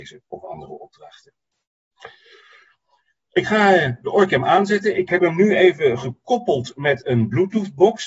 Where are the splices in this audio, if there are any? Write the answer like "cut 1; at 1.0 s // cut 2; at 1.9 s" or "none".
none